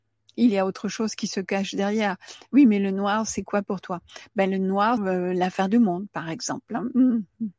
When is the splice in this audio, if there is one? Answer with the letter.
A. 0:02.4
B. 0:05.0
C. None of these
B